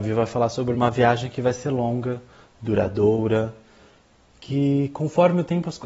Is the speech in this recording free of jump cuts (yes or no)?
yes